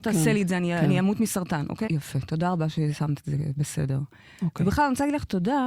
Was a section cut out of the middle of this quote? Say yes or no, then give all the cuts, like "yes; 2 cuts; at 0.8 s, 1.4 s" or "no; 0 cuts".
yes; 1 cut; at 1.9 s